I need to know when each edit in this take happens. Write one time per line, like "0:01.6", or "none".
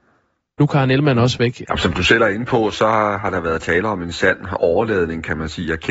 0:01.6